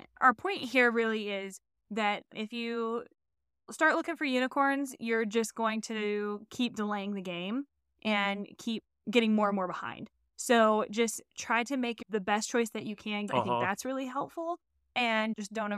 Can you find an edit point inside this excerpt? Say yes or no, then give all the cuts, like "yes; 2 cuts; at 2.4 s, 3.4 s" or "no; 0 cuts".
yes; 1 cut; at 13.3 s